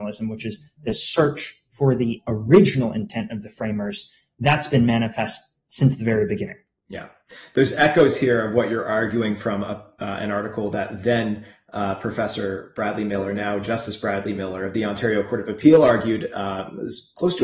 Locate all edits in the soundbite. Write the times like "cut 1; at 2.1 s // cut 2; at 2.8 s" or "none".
none